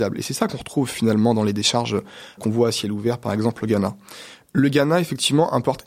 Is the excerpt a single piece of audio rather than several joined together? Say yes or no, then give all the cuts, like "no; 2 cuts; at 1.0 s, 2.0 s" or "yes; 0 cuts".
no; 2 cuts; at 2.4 s, 4.4 s